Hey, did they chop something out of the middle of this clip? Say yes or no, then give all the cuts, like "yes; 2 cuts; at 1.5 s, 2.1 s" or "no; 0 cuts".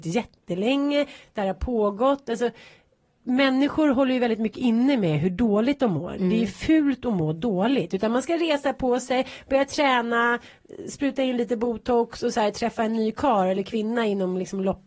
no; 0 cuts